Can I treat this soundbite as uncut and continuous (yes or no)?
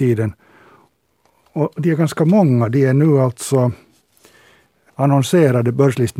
yes